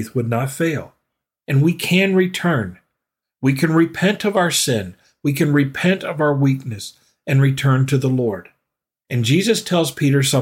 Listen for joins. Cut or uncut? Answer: uncut